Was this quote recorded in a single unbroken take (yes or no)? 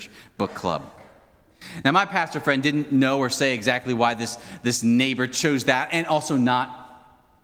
yes